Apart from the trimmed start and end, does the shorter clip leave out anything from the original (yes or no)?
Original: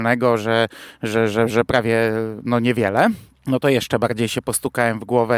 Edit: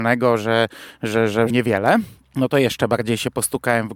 yes